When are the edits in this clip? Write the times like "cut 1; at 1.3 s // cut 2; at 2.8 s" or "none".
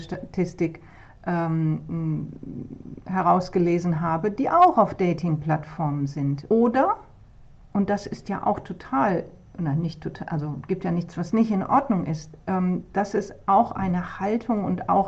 cut 1; at 6.5 s

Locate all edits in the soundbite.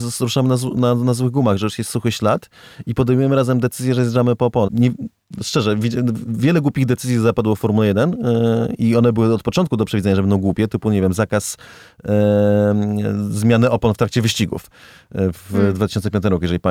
cut 1; at 4.7 s

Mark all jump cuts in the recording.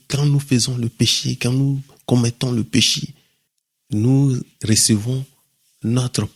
none

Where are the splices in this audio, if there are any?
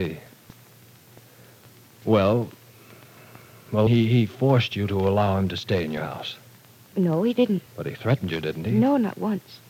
cut 1; at 3.9 s // cut 2; at 7.7 s

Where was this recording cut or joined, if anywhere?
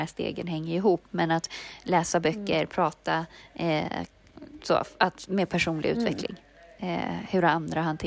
none

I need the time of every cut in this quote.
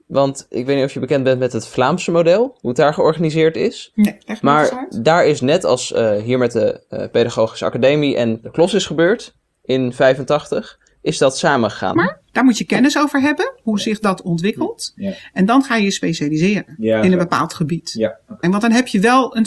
cut 1; at 11.9 s // cut 2; at 18.4 s

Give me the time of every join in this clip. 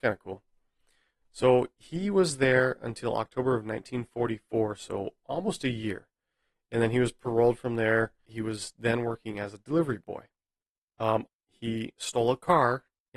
cut 1; at 11.3 s

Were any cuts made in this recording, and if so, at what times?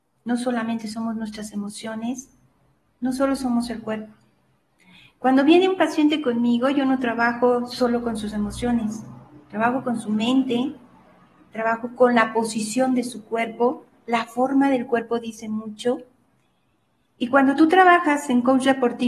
none

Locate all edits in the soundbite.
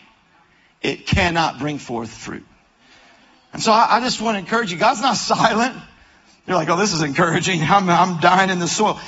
none

